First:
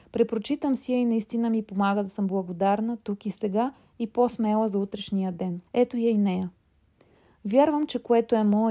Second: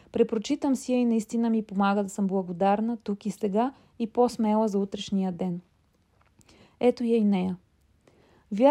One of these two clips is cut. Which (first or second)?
first